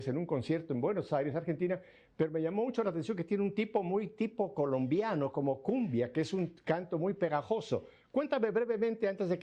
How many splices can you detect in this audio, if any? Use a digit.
0